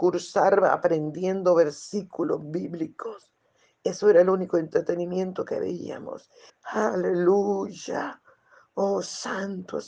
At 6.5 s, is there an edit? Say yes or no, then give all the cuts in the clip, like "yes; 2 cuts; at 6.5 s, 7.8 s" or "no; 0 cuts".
yes; 1 cut; at 6.5 s